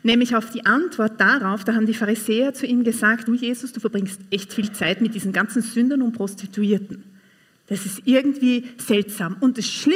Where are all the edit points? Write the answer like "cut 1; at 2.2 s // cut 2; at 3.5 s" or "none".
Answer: cut 1; at 3.3 s